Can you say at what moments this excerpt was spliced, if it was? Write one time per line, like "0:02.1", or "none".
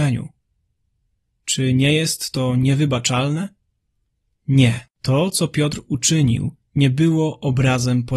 0:04.9
0:06.7